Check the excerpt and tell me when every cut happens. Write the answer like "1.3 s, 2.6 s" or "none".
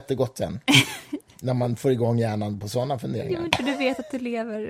3.5 s